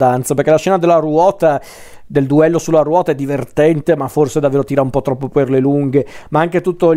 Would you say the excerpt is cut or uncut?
uncut